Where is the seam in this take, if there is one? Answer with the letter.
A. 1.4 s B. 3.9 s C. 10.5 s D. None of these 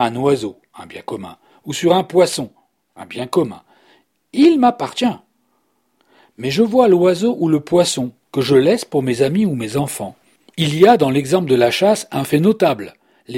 C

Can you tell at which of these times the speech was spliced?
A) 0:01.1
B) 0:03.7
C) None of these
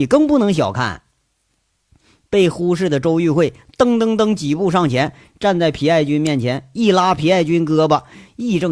C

